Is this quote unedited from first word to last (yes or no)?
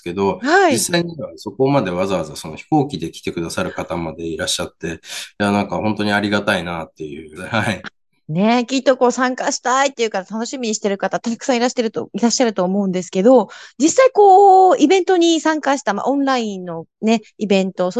no